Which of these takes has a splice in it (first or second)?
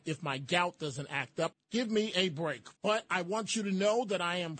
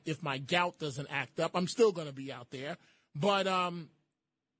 first